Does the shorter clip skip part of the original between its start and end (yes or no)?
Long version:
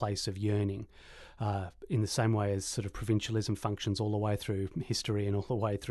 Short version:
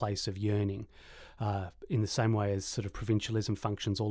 no